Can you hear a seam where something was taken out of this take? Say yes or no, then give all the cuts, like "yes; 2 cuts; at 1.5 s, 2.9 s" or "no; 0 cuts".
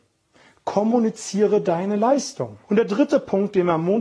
yes; 1 cut; at 2.6 s